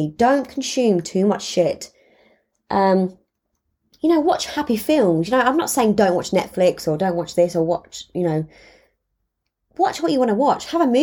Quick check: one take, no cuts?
yes; 0 cuts

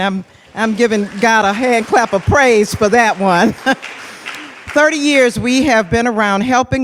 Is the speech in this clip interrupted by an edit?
no; 0 cuts

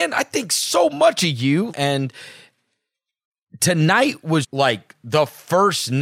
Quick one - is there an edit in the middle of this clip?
yes; 2 cuts; at 1.7 s, 4.4 s

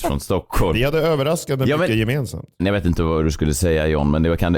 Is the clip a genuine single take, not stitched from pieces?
no; 1 cut; at 2.6 s

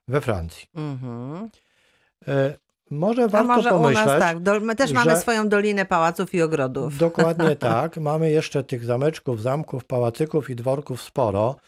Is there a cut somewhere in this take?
no; 0 cuts

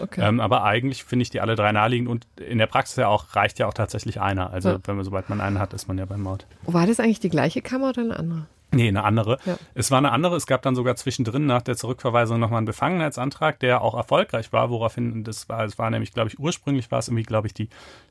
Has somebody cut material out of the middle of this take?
no; 0 cuts

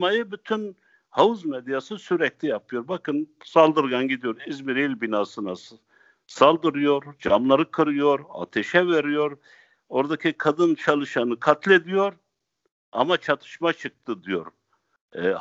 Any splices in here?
no; 0 cuts

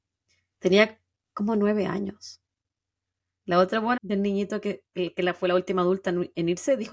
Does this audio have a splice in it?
yes; 1 cut; at 4.0 s

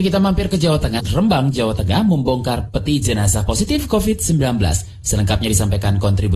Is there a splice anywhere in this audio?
yes; 2 cuts; at 1.0 s, 5.0 s

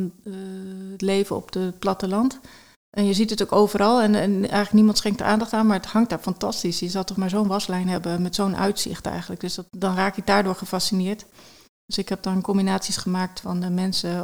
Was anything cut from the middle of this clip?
no; 0 cuts

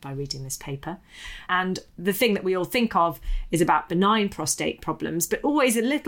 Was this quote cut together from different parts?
yes; 1 cut; at 1.5 s

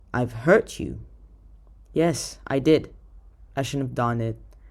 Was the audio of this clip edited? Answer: yes; 1 cut; at 3.5 s

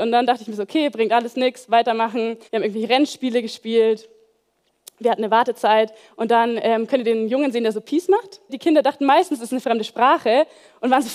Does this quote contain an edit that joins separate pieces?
yes; 2 cuts; at 2.5 s, 8.5 s

